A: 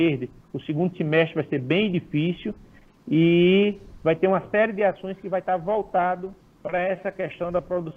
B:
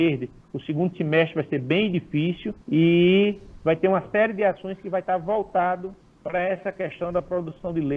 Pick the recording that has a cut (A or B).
B